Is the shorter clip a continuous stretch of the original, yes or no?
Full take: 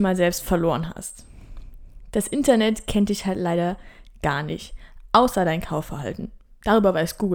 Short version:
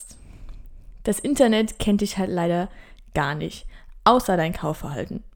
yes